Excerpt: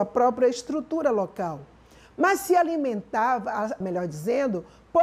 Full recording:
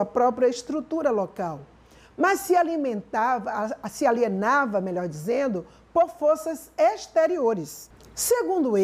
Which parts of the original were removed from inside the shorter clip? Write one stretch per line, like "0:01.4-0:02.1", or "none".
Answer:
0:03.8-0:04.8